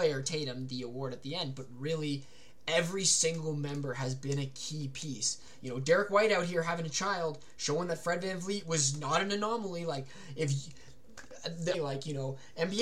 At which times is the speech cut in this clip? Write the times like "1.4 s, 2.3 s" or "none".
11.7 s

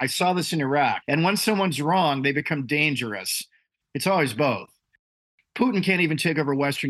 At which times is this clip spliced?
1.0 s, 3.8 s

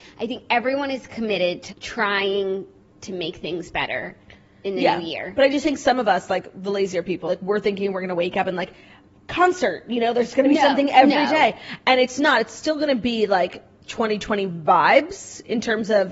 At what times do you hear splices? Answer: 1.7 s, 7.3 s

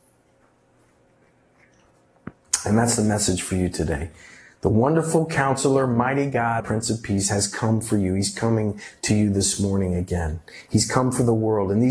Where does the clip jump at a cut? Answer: 6.6 s

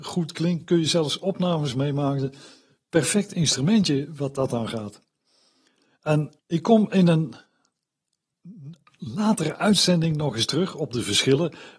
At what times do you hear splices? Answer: 6.4 s

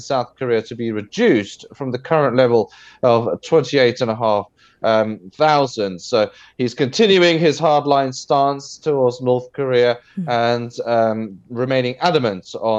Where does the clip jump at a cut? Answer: none

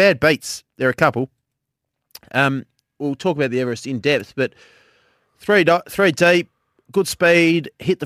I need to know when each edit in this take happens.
2.8 s

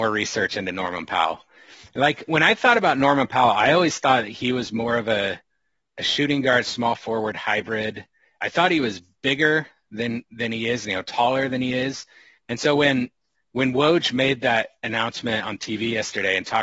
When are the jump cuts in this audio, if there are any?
none

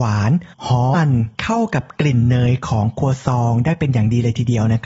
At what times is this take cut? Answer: 0.9 s

